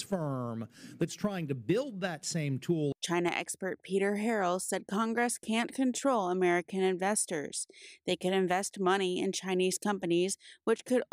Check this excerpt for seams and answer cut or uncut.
uncut